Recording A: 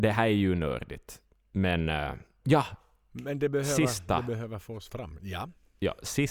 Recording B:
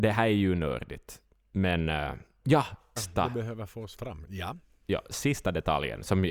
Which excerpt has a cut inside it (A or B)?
B